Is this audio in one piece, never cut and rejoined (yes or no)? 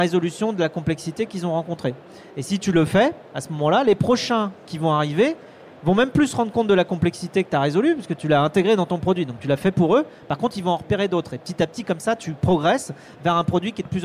yes